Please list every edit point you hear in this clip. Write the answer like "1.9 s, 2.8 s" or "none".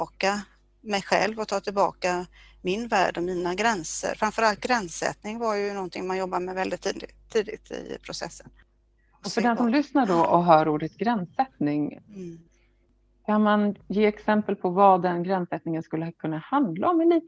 none